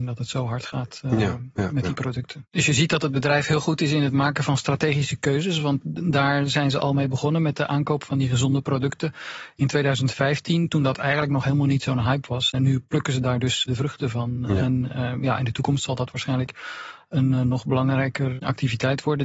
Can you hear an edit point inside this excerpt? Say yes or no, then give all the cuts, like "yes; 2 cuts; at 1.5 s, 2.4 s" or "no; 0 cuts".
no; 0 cuts